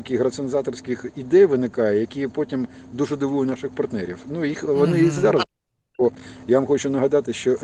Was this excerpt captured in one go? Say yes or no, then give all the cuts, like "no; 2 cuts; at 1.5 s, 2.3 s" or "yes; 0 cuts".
yes; 0 cuts